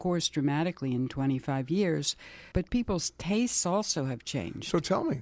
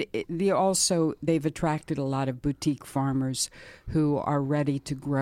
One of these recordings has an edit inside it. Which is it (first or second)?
first